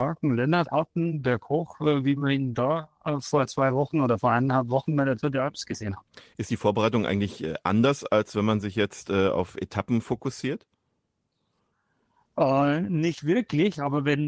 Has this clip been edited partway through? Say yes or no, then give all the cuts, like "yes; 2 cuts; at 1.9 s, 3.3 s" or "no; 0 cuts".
no; 0 cuts